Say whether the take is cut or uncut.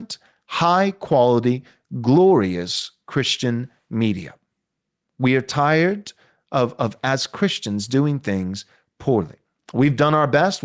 uncut